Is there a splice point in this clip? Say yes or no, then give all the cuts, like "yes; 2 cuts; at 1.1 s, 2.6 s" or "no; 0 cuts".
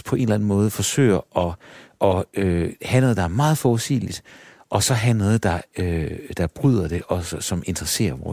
no; 0 cuts